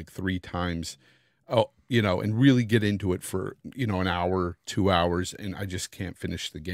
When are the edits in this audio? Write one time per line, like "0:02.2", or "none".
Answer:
none

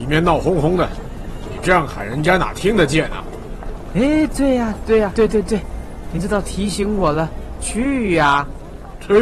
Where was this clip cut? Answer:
0:05.1
0:07.6

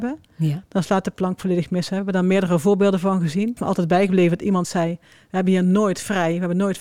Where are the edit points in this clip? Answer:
0:03.6

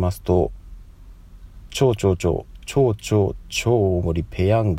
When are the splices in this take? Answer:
none

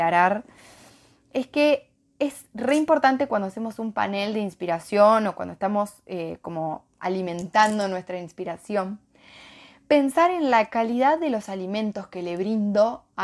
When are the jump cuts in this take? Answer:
none

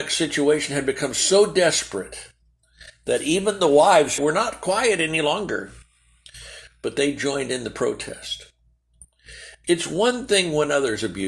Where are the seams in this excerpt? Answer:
0:04.2

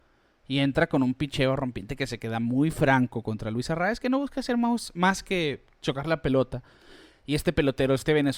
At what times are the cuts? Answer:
none

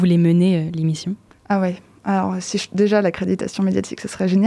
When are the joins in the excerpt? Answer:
none

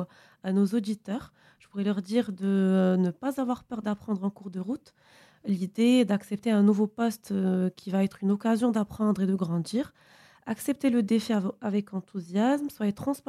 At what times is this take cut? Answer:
none

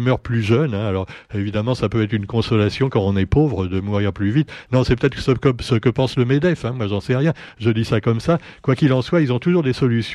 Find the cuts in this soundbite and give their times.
none

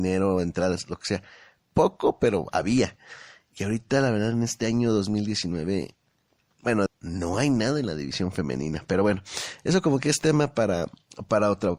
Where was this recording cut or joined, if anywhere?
0:01.6
0:06.9

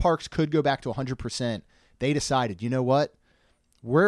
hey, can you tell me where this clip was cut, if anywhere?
none

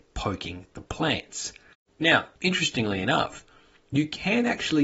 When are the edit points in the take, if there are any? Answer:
0:01.9

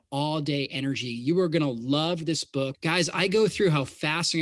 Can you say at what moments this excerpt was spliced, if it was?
0:02.7

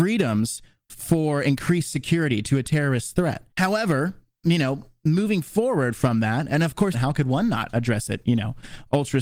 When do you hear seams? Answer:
0:03.5
0:06.9

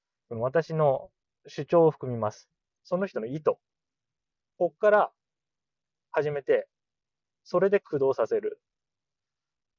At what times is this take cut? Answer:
0:02.8

